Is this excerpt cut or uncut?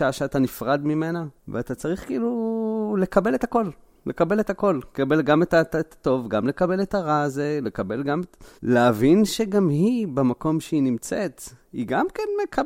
cut